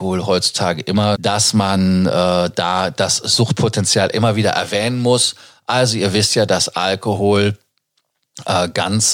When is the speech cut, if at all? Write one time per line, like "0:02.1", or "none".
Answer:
0:01.1